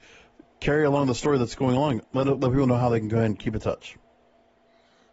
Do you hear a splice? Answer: no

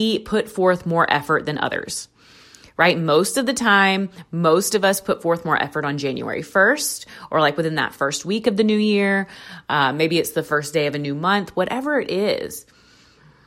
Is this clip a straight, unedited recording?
yes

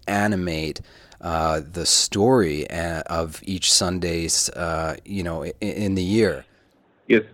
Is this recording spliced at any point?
no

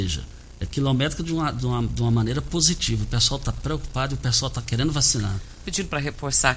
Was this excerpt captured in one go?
no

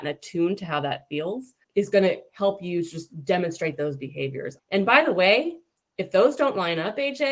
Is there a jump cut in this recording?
yes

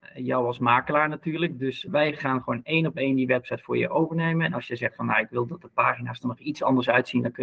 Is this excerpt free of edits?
no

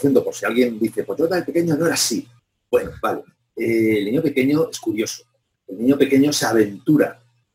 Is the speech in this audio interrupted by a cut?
yes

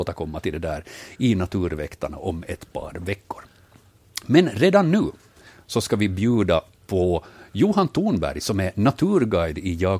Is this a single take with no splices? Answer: yes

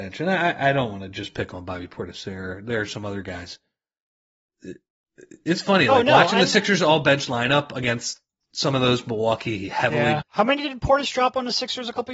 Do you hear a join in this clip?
yes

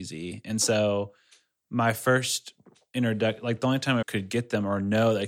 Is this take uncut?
no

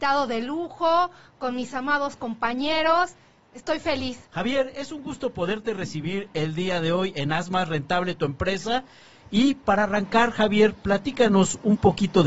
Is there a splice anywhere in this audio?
yes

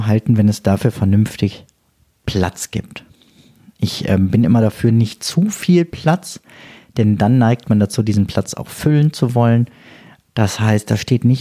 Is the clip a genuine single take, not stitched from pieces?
no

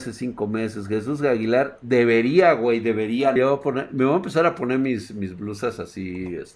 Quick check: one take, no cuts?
no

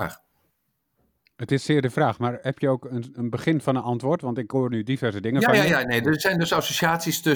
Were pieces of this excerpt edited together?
no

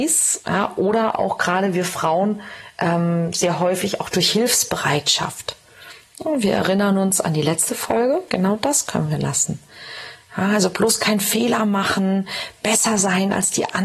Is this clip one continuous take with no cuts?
no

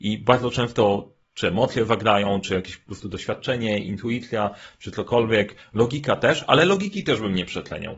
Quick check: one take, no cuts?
yes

